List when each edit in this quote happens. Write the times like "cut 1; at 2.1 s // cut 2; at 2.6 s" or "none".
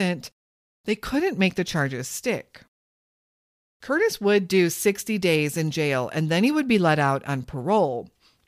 none